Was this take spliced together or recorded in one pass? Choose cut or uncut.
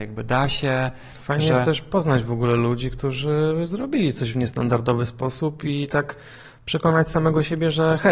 uncut